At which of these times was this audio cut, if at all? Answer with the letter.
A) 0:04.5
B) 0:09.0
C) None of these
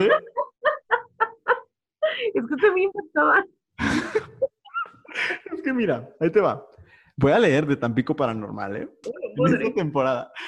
B